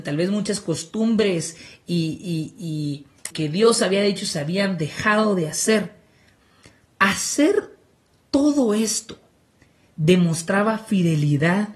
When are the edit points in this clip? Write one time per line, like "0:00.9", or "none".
0:03.3

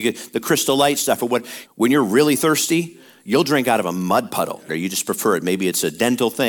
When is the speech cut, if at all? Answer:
0:01.7
0:04.7

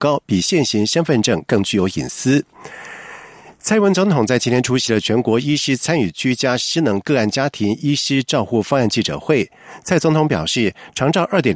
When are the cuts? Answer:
none

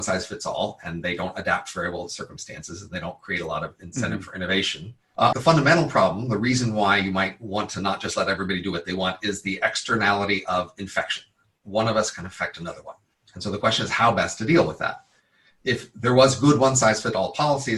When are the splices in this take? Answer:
0:05.3

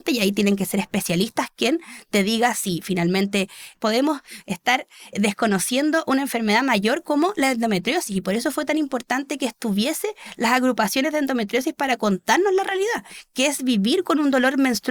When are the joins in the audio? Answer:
0:05.1

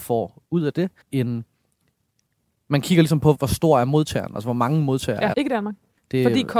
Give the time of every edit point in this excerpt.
0:01.0
0:03.3
0:05.3

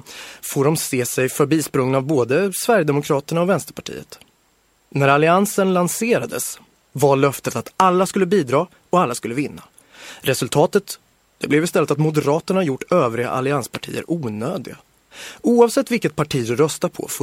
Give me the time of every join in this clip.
none

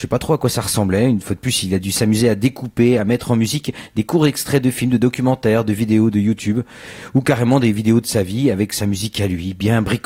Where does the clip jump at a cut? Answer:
0:03.0

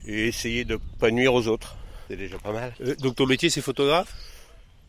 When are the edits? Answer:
0:02.7

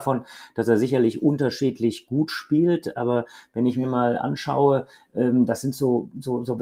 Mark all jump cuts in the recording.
none

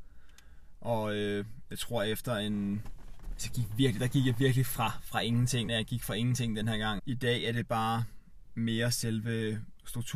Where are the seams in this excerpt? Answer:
0:05.7
0:07.0

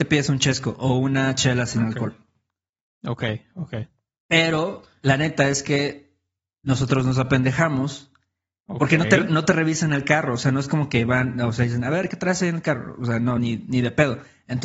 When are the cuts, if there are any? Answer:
none

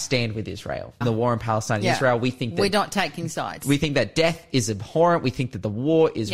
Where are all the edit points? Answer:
0:01.0

